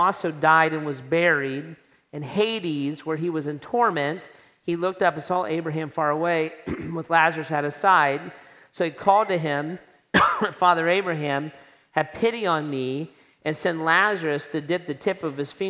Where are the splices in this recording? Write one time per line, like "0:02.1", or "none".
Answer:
none